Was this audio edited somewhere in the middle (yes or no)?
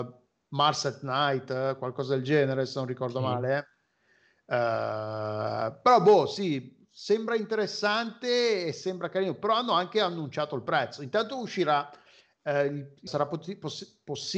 yes